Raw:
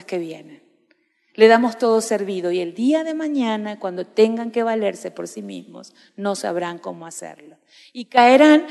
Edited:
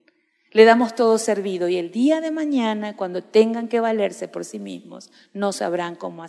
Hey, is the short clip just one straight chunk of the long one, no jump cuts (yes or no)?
yes